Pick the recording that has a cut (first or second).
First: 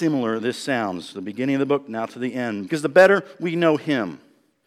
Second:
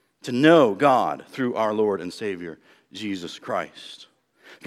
first